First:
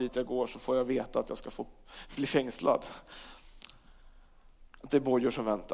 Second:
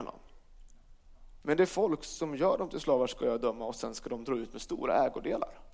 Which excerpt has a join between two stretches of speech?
second; 1 cut; at 1.4 s

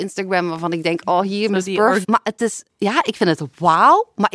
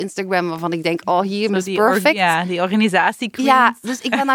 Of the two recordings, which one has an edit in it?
first; 1 cut; at 2.0 s

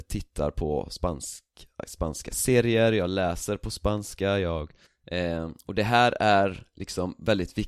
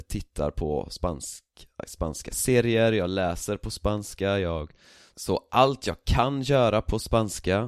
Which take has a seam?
first; 1 cut; at 4.9 s

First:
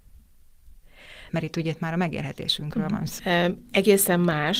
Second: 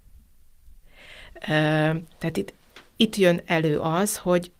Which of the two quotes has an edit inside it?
first; 2 cuts; at 1.3 s, 3.2 s

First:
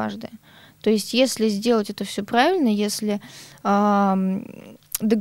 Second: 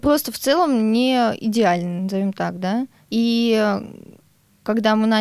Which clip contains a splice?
second; 1 cut; at 3.1 s

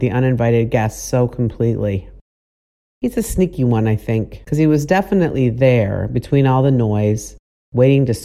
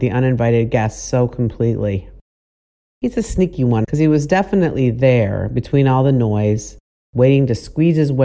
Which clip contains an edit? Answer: second; 1 cut; at 3.8 s

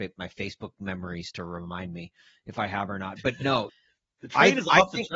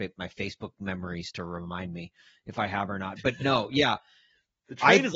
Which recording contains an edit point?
first; 1 cut; at 3.7 s

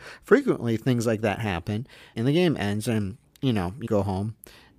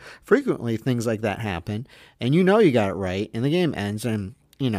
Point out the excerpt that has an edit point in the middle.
first; 2 cuts; at 2.1 s, 3.9 s

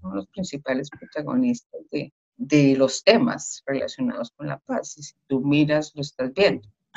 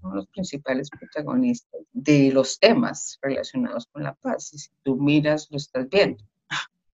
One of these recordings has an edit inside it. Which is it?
second; 1 cut; at 1.8 s

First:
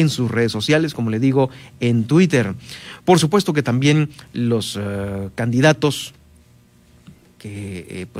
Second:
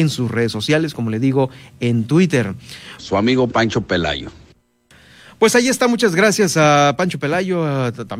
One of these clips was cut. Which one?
second; 1 cut; at 3.0 s

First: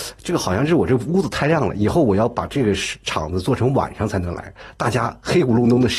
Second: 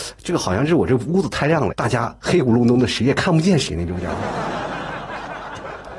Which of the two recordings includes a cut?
second; 1 cut; at 1.7 s

